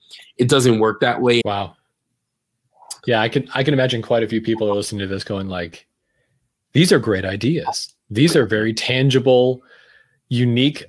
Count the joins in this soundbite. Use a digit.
1